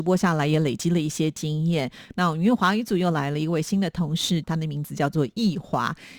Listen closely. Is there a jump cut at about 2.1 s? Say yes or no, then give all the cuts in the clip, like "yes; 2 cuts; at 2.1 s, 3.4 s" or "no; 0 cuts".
yes; 2 cuts; at 2.1 s, 4.4 s